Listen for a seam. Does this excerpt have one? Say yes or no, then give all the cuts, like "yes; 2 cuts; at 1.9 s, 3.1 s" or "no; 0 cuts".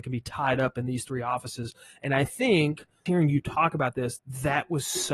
yes; 2 cuts; at 3.1 s, 4.2 s